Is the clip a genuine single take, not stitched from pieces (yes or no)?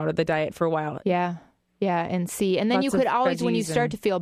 yes